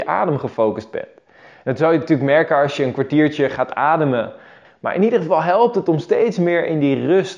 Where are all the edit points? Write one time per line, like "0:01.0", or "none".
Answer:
0:04.6